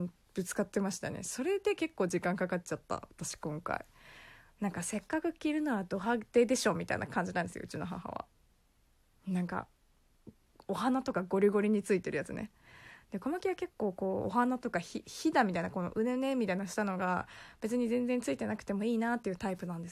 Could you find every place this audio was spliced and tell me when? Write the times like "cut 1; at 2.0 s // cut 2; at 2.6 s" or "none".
none